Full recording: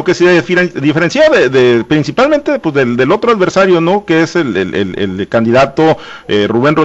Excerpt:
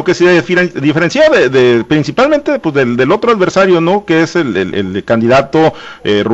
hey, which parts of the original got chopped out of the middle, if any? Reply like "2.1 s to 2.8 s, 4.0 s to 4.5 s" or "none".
4.7 s to 4.9 s